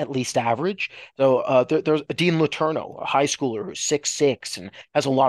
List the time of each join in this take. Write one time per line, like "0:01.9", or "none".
0:01.1